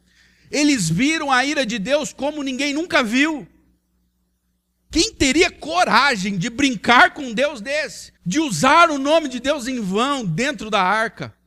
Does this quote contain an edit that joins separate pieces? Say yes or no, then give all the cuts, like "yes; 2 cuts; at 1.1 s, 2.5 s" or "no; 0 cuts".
yes; 2 cuts; at 4.9 s, 8.2 s